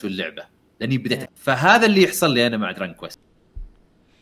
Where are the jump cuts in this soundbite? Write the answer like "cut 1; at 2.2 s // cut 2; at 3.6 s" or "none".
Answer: cut 1; at 1.3 s